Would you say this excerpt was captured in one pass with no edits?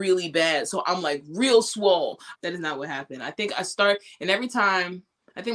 no; 1 cut; at 2.3 s

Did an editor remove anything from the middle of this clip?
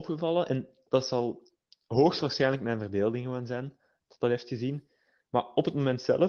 no; 0 cuts

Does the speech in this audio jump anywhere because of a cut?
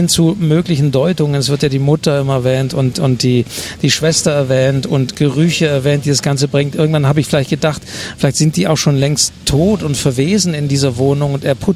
no; 0 cuts

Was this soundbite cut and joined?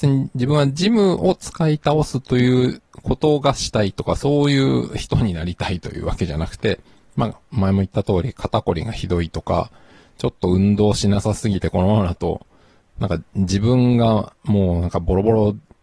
no; 0 cuts

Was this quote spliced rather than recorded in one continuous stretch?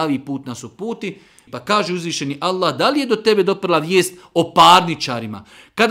yes; 1 cut; at 1.5 s

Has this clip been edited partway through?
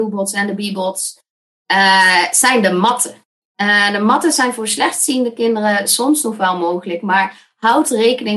no; 0 cuts

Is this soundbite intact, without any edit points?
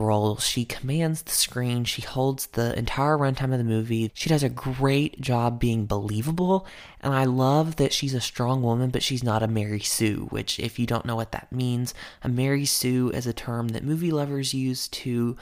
no; 1 cut; at 4.1 s

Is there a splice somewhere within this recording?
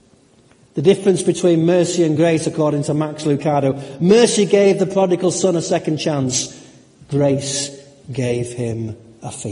no; 0 cuts

